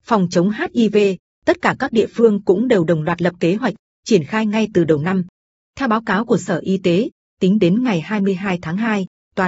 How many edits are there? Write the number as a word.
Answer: one